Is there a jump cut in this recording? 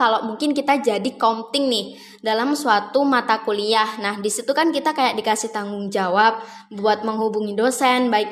no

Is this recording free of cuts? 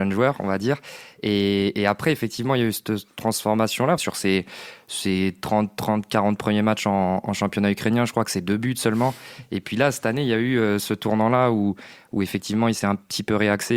no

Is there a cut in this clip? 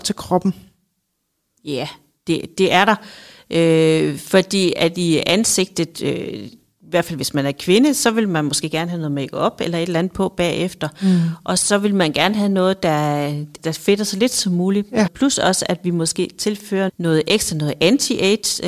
yes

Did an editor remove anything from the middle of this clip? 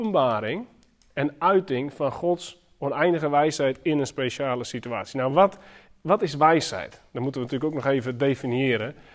no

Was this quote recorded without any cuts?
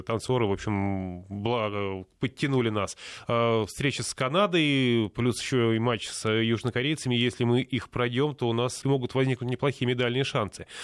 no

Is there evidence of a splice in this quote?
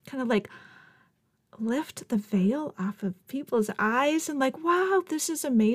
no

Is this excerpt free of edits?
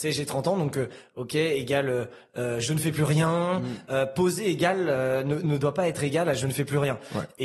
yes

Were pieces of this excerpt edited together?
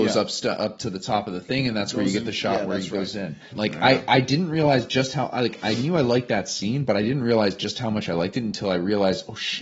yes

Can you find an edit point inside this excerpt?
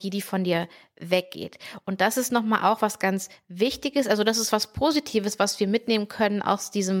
no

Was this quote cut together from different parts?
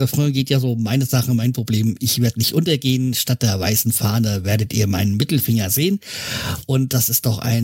no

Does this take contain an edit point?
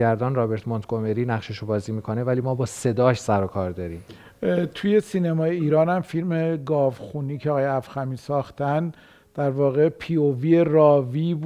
no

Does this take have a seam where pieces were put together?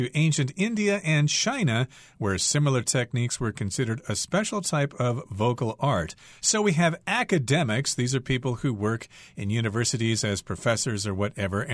no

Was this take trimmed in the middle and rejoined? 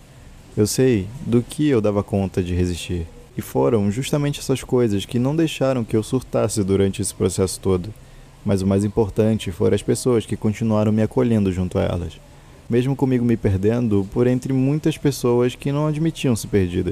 no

